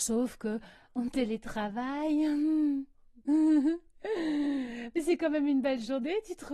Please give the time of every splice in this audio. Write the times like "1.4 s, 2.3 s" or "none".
none